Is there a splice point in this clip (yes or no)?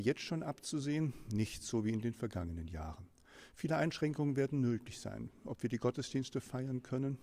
no